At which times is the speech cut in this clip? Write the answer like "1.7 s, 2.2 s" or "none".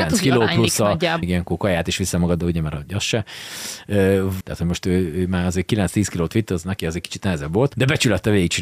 1.2 s, 4.4 s